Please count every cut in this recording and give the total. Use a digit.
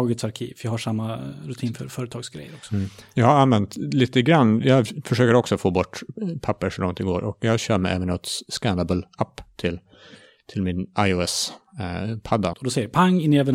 1